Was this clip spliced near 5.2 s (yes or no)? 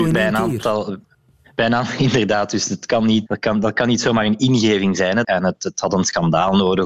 yes